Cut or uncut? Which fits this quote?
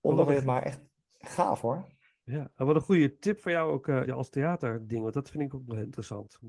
cut